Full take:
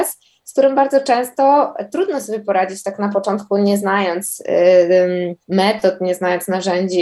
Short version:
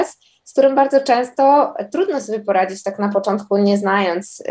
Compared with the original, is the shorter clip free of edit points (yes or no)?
yes